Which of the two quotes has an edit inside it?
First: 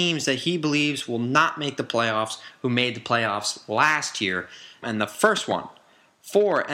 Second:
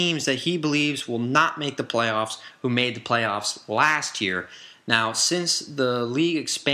first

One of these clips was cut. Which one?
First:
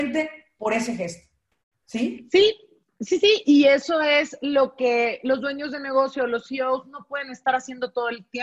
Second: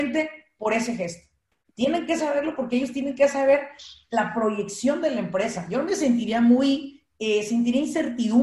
second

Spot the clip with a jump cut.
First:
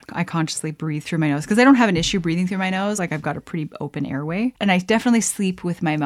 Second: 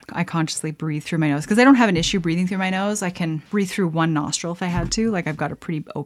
first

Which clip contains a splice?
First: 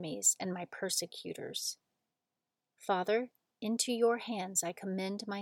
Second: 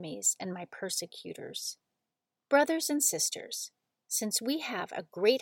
second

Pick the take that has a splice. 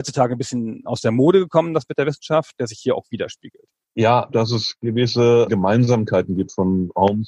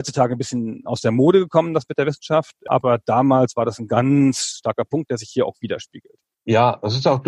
first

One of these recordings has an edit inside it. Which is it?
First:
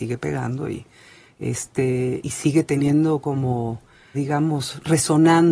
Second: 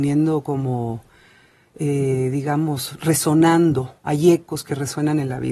first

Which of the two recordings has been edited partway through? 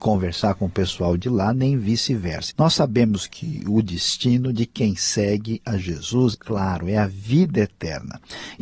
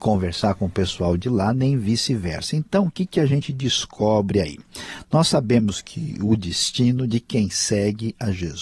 first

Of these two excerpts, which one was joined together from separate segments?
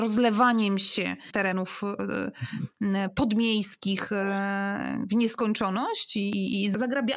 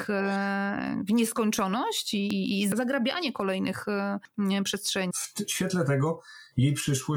second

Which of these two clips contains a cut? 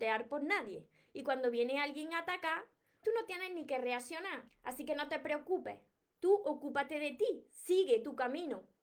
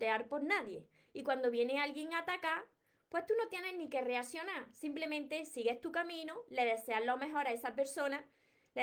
first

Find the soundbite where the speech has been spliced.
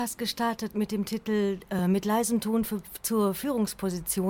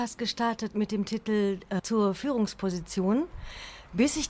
second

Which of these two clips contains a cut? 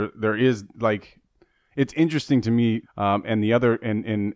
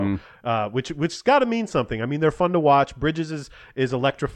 first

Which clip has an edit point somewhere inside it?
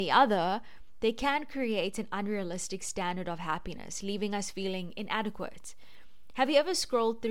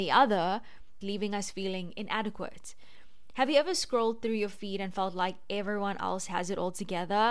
second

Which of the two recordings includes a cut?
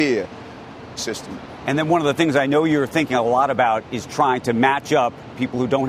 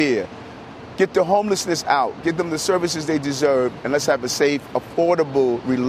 first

